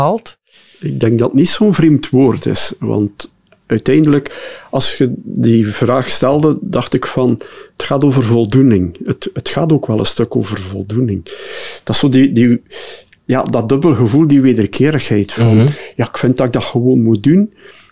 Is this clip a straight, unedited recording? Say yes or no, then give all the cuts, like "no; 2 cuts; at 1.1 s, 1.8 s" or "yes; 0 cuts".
yes; 0 cuts